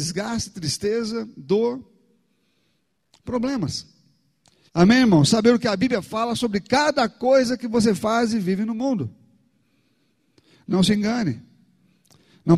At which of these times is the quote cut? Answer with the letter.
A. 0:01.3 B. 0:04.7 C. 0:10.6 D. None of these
B